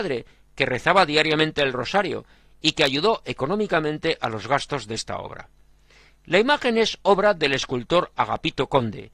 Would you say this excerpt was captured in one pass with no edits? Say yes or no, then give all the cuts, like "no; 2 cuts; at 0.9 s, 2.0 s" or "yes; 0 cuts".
yes; 0 cuts